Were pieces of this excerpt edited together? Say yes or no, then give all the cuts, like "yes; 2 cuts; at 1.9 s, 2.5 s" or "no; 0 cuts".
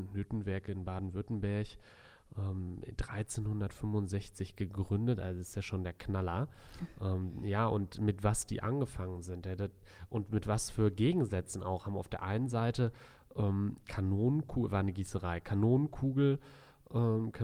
no; 0 cuts